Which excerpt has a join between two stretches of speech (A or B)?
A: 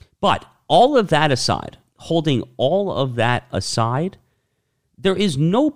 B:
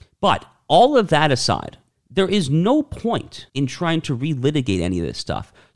B